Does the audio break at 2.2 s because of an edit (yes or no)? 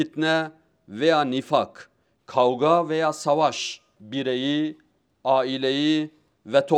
yes